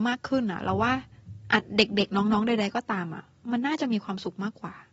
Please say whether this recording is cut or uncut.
uncut